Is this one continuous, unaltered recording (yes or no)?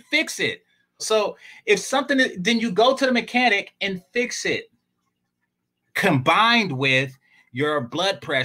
no